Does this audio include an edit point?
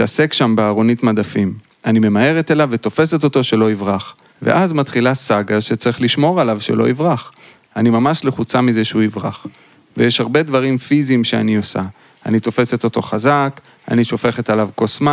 yes; 1 cut; at 4.3 s

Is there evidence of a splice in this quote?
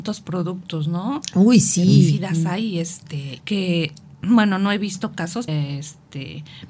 yes; 2 cuts; at 3.4 s, 5.5 s

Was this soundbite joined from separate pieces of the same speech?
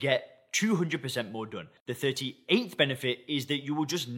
yes; 1 cut; at 1.8 s

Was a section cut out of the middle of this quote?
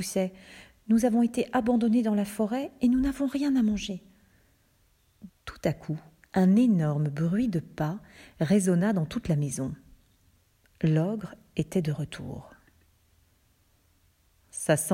yes; 1 cut; at 5.3 s

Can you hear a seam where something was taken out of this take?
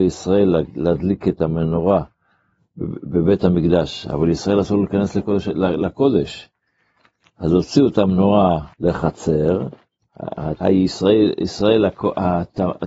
yes; 2 cuts; at 8.7 s, 10.6 s

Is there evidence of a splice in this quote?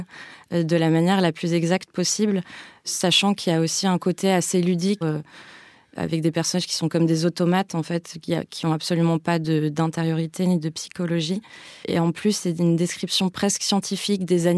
yes; 2 cuts; at 5.0 s, 11.8 s

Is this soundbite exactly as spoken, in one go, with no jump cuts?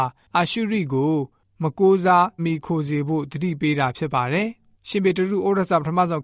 no; 1 cut; at 2.4 s

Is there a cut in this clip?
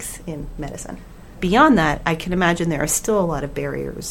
yes; 1 cut; at 1.3 s

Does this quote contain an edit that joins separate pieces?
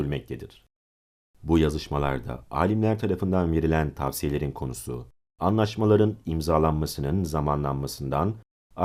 no; 0 cuts

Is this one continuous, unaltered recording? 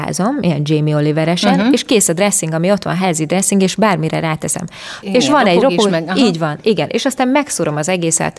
no; 1 cut; at 5.0 s

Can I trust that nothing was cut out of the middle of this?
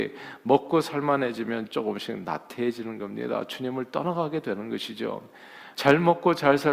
no; 1 cut; at 5.7 s

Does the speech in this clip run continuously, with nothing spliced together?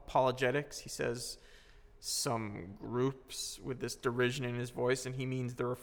yes; 0 cuts

